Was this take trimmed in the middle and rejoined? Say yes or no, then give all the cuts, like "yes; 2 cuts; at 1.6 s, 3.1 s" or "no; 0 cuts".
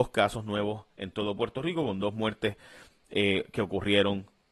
no; 0 cuts